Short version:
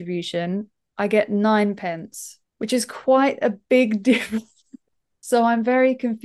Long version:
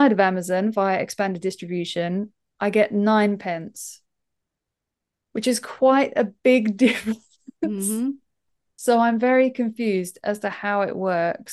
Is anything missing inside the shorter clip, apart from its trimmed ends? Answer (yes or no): yes